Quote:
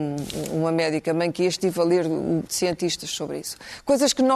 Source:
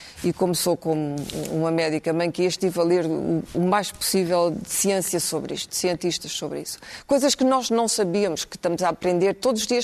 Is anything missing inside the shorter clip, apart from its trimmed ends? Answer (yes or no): yes